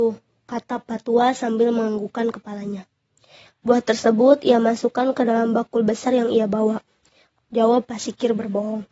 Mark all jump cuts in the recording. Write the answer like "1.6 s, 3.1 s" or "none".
3.5 s, 7.3 s